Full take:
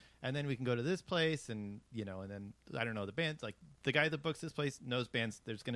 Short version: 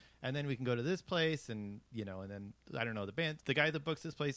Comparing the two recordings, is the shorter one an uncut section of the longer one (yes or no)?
no